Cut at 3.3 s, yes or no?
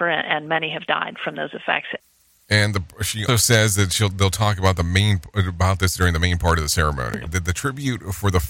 yes